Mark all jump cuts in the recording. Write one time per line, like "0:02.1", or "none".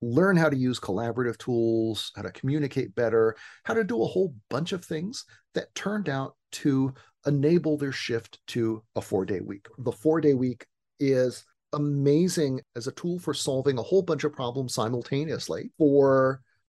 0:15.7